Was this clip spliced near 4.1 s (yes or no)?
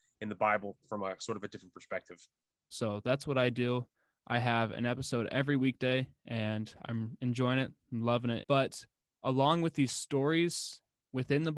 no